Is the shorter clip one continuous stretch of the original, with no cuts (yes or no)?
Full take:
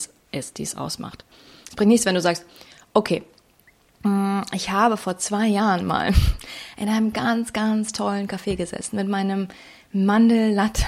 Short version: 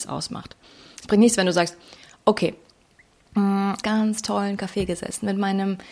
no